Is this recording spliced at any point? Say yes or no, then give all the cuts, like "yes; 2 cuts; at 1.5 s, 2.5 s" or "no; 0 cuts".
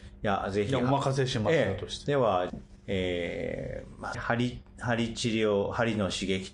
yes; 2 cuts; at 2.5 s, 4.1 s